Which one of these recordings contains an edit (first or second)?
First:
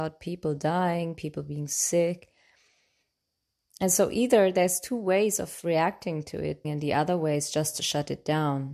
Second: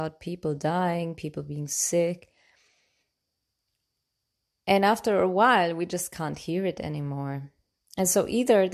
first